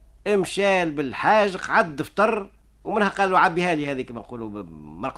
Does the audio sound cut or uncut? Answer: uncut